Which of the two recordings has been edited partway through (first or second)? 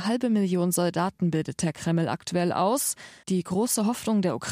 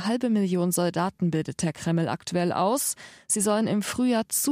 first